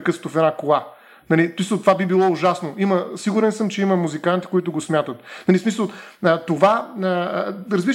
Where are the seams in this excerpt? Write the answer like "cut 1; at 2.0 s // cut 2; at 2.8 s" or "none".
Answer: none